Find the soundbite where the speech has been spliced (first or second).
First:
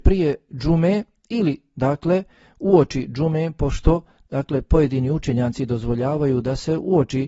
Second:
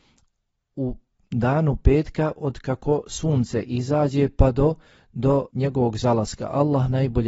second